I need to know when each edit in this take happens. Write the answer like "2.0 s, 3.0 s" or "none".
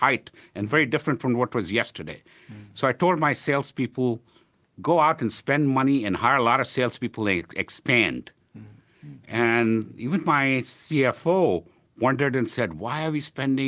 none